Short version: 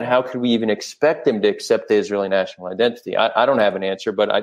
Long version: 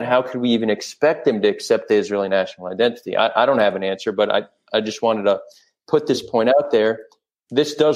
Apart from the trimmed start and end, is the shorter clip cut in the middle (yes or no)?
no